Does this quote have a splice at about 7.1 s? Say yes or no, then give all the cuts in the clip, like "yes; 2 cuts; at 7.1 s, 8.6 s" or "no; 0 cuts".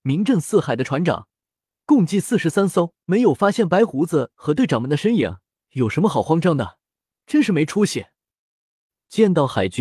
no; 2 cuts; at 3.0 s, 5.5 s